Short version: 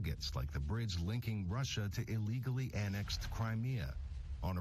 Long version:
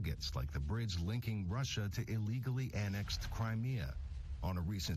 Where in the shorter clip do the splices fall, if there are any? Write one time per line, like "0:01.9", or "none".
none